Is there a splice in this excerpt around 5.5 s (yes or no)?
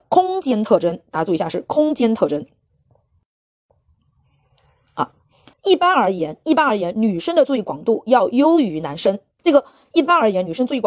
yes